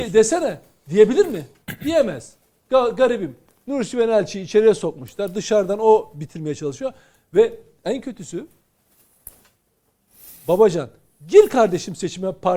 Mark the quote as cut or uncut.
uncut